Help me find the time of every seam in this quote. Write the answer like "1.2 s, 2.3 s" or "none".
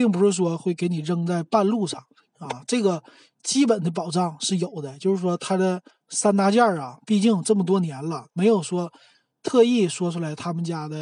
8.3 s

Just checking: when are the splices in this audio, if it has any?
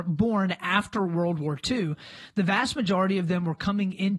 none

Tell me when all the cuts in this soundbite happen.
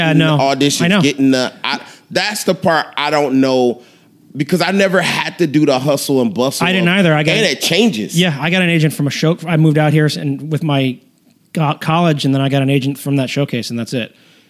none

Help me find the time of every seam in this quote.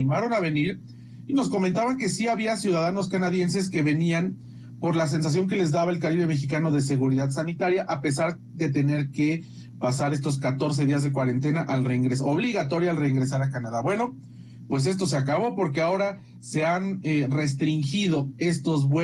none

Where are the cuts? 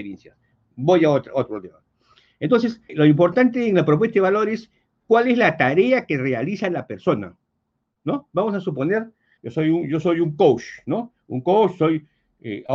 2.9 s, 9.4 s

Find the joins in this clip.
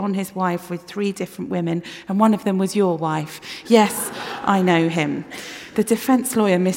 none

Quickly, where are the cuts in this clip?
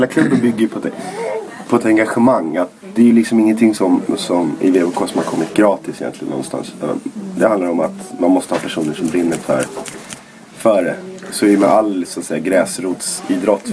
none

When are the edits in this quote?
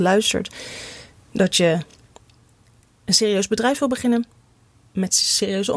none

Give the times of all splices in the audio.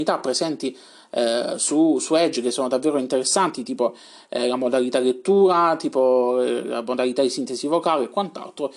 none

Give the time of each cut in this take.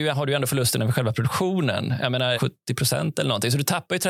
2.4 s

